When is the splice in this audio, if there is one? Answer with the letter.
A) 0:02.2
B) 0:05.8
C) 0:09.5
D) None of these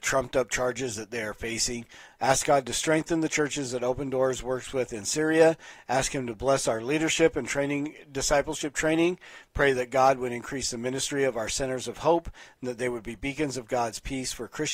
A